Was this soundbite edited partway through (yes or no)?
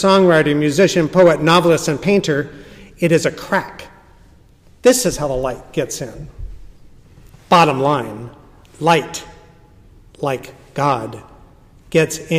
no